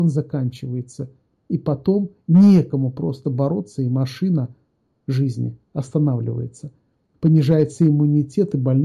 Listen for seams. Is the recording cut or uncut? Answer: uncut